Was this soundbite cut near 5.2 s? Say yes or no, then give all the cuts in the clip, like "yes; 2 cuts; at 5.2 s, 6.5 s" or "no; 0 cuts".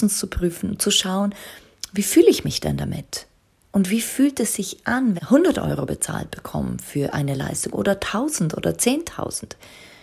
yes; 1 cut; at 5.2 s